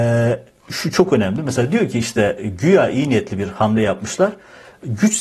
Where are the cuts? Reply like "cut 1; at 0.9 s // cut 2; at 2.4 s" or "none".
none